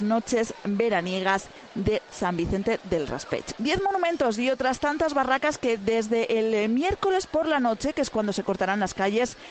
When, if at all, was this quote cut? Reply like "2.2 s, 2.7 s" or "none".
3.6 s